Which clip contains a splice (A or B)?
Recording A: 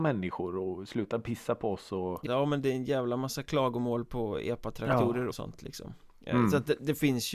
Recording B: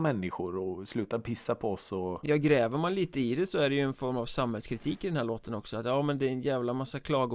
A